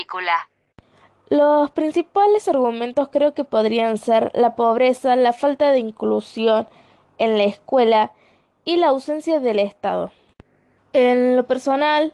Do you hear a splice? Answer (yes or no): yes